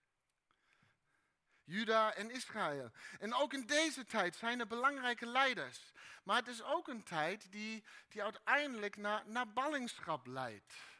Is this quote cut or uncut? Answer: uncut